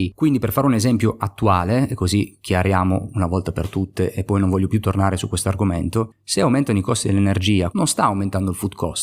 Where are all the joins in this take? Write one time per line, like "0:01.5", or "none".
0:07.7